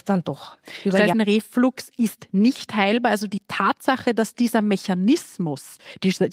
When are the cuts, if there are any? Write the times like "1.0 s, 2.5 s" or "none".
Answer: 1.1 s

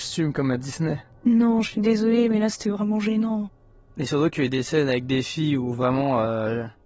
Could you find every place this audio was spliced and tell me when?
none

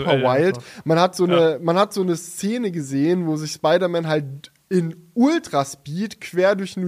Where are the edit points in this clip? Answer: none

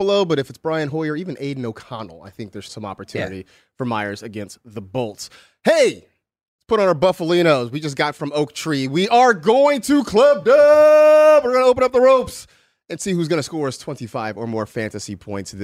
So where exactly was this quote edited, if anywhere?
2.7 s

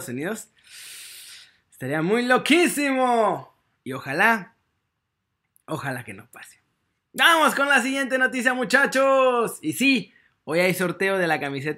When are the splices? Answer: none

